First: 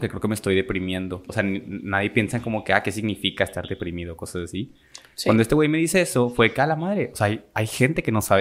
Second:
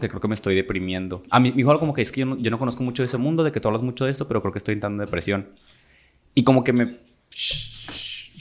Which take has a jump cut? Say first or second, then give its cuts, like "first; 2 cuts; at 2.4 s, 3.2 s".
first; 1 cut; at 1.3 s